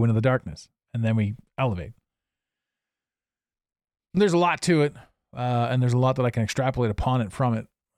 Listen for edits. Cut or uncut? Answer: uncut